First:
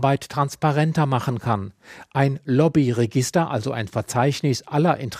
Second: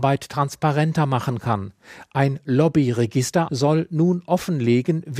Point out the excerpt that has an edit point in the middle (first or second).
second